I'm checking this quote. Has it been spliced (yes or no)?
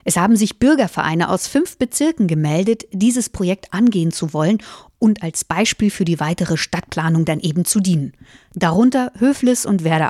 no